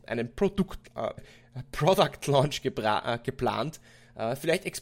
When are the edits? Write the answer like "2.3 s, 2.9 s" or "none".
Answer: 1.2 s